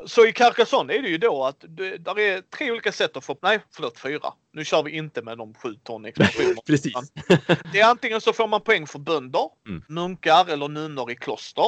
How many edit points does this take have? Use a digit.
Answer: 1